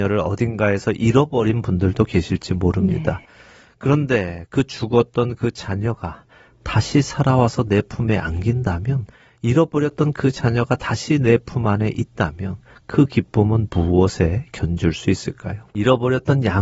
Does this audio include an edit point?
no; 0 cuts

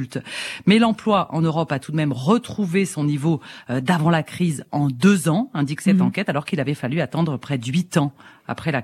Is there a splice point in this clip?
no; 0 cuts

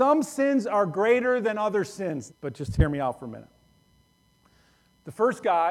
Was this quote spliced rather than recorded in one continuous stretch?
yes; 1 cut; at 2.3 s

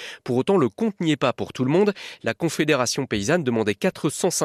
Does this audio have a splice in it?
no; 0 cuts

